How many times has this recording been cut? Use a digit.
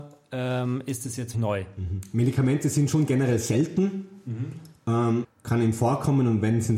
2